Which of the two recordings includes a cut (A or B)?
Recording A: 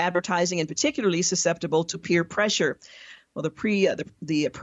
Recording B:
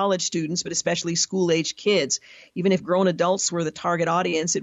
A